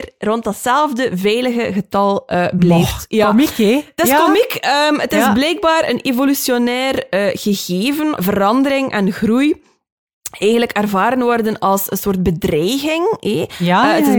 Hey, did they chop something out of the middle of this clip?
yes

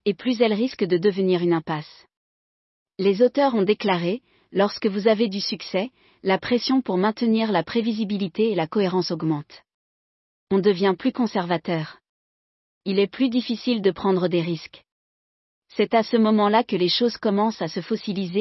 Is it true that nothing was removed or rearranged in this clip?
yes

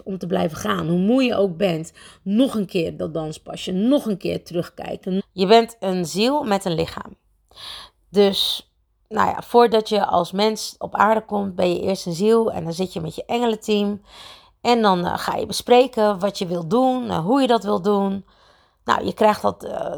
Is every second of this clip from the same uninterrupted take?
no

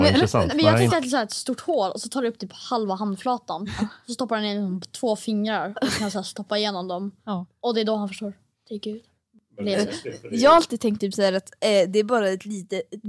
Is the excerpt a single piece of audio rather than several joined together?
yes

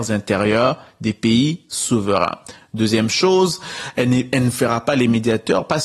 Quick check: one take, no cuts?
yes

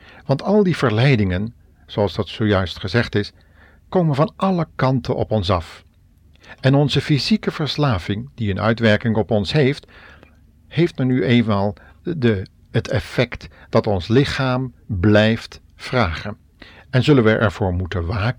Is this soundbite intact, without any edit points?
yes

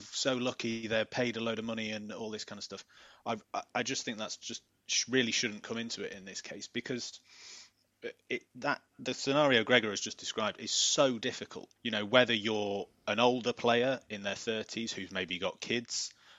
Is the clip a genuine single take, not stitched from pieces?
no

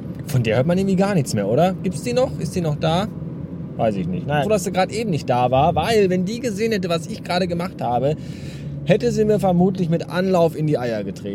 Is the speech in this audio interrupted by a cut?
yes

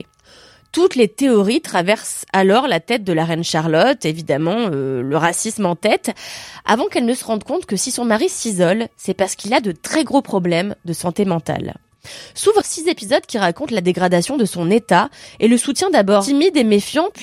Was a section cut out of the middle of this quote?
yes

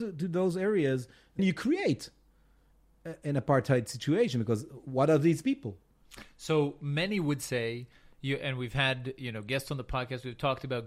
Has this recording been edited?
yes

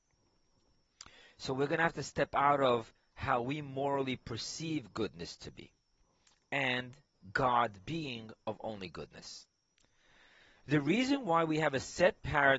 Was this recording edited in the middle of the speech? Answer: yes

